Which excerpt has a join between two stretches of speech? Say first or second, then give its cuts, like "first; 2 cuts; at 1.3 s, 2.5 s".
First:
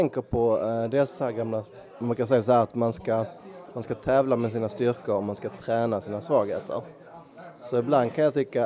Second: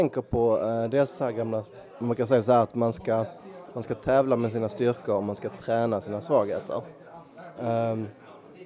second; 1 cut; at 7.6 s